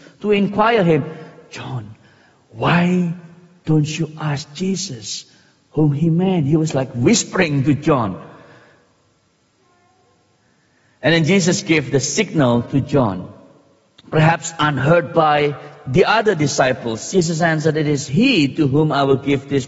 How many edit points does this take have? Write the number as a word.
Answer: zero